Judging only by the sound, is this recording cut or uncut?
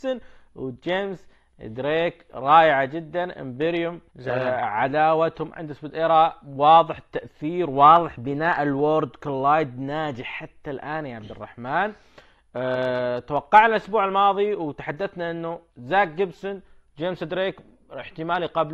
cut